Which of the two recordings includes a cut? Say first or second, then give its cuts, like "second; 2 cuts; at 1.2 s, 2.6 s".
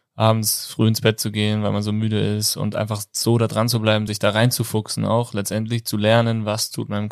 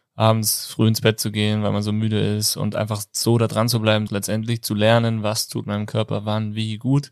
second; 1 cut; at 4.1 s